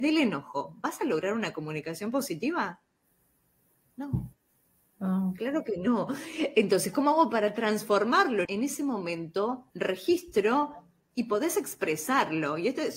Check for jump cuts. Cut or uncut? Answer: cut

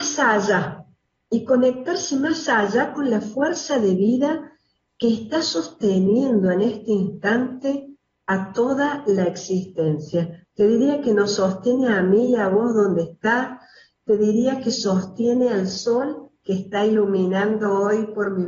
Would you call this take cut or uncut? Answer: uncut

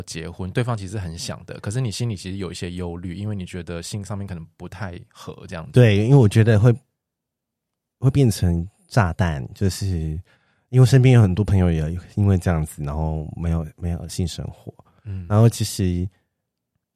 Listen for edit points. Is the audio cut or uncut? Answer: uncut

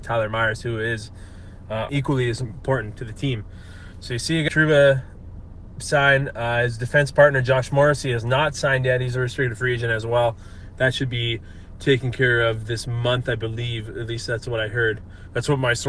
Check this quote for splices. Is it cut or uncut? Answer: cut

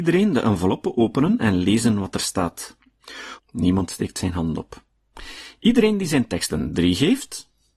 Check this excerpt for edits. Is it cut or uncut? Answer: cut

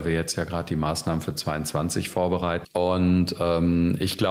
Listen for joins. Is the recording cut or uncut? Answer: cut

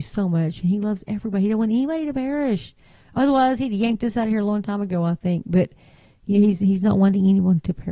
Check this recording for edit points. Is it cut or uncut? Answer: uncut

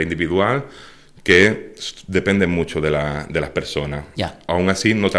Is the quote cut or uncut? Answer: uncut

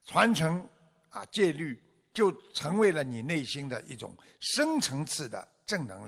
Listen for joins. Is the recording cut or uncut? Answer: cut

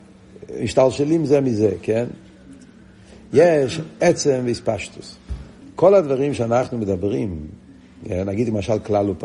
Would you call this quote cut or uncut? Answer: cut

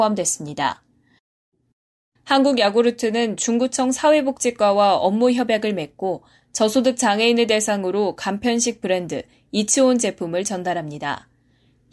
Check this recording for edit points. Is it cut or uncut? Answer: cut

